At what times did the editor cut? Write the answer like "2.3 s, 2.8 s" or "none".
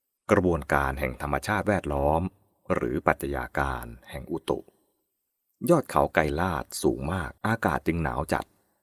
7.4 s